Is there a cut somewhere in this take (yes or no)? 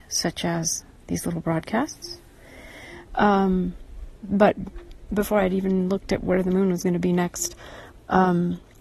yes